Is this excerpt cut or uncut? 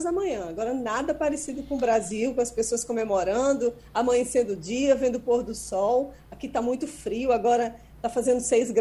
uncut